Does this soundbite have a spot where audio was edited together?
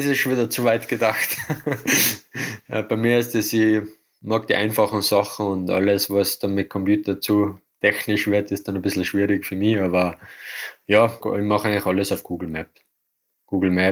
yes; 1 cut; at 11.2 s

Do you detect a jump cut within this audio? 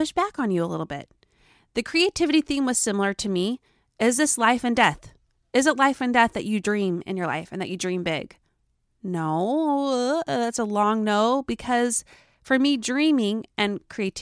no; 0 cuts

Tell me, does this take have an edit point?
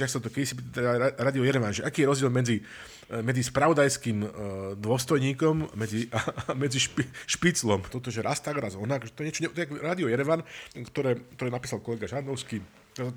yes; 2 cuts; at 7.9 s, 10.7 s

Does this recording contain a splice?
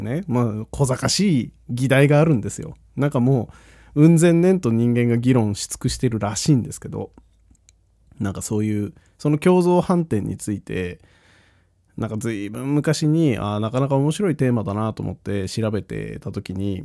no; 0 cuts

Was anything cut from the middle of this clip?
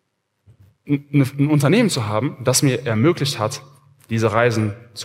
no; 0 cuts

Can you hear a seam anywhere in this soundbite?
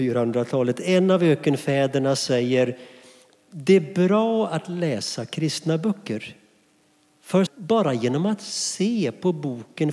yes; 1 cut; at 7.5 s

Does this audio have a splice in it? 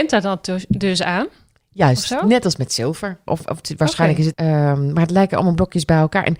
yes; 2 cuts; at 3.3 s, 4.3 s

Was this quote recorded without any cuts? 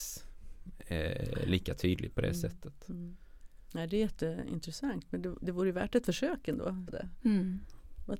no; 1 cut; at 6.9 s

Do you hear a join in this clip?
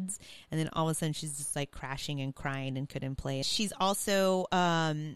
yes; 1 cut; at 3.4 s

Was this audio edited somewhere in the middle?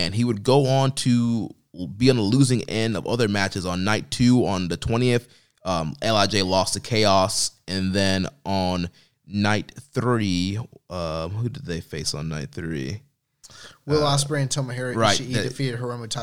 no; 0 cuts

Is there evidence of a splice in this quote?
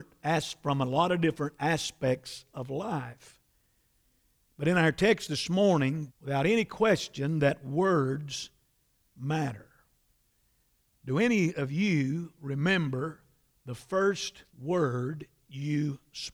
yes; 2 cuts; at 6.1 s, 14.5 s

